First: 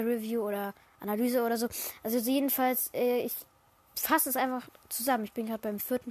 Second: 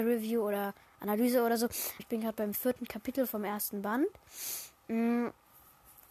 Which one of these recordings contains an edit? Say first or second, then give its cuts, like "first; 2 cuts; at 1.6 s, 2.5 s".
second; 1 cut; at 2.0 s